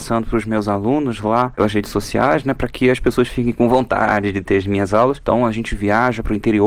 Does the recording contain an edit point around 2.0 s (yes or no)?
no